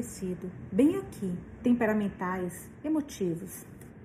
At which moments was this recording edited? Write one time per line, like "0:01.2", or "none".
0:01.6